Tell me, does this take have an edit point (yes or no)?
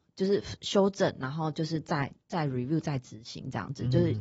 yes